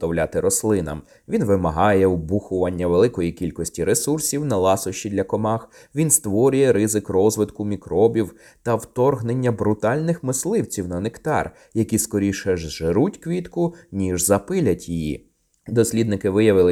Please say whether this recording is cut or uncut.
cut